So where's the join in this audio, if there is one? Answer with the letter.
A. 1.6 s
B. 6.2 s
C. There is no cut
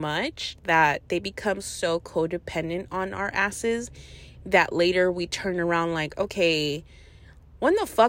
C